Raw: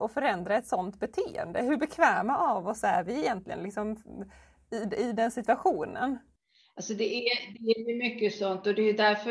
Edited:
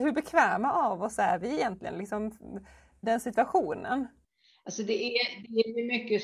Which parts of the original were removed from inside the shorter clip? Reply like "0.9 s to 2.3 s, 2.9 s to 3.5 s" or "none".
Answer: 4.7 s to 5.1 s

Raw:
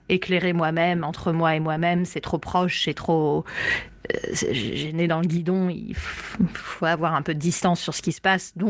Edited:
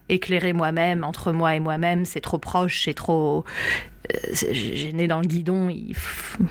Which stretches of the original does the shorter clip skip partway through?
none

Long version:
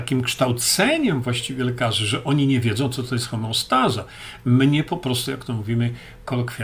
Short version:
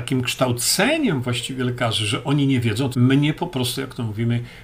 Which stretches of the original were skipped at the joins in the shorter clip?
2.9 s to 4.4 s

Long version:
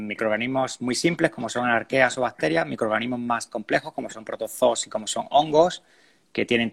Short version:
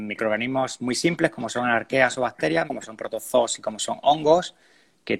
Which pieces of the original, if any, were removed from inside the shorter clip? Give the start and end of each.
2.7 s to 3.9 s

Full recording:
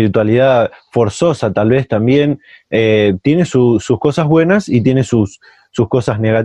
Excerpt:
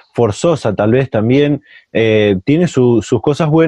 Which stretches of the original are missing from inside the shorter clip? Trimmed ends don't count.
none

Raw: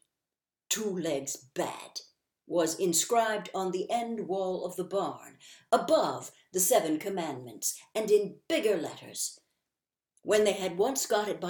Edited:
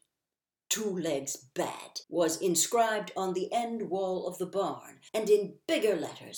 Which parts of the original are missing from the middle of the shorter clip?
2.0 s to 2.4 s, 5.5 s to 7.9 s

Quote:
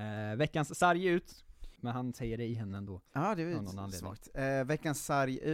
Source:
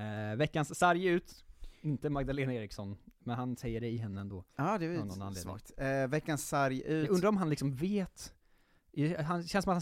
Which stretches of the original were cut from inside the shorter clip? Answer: 1.8 s to 3.2 s

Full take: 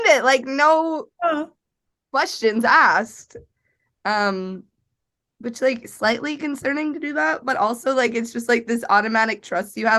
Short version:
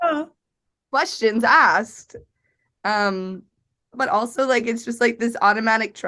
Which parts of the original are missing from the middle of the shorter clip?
5.1 s to 7.4 s

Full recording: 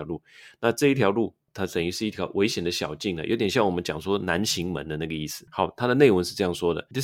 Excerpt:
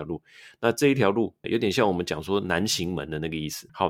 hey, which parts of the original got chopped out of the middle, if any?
1.4 s to 3.2 s

